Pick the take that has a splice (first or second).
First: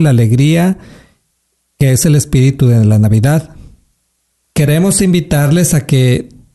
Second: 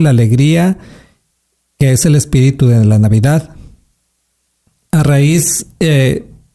first